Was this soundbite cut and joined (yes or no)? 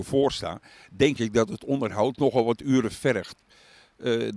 no